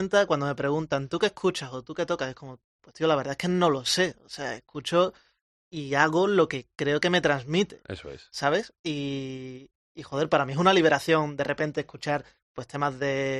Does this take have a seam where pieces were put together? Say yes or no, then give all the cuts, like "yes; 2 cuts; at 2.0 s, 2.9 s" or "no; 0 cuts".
no; 0 cuts